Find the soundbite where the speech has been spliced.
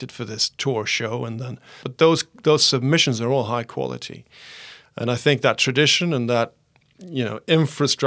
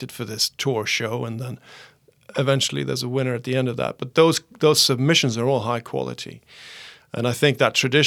first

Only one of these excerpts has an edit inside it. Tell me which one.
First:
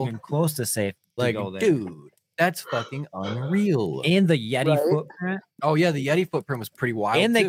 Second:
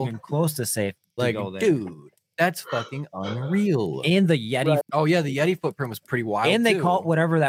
second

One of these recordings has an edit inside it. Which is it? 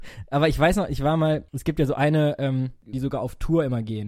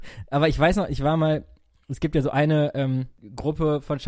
first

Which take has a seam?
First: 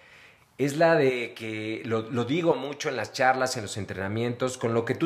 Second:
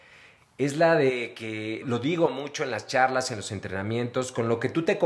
second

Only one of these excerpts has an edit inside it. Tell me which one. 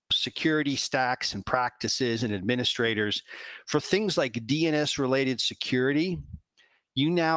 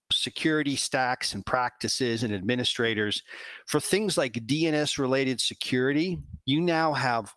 second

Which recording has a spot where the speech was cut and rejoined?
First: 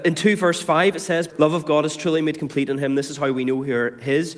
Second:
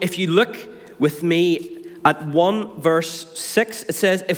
first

